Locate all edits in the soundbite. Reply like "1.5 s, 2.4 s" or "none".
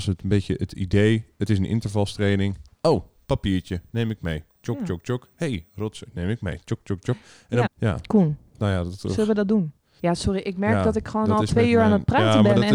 2.7 s, 7.7 s, 10.0 s